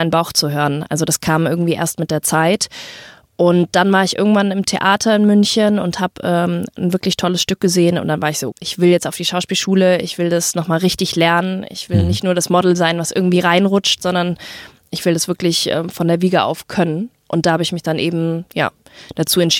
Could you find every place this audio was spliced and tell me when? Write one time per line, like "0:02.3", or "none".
0:08.5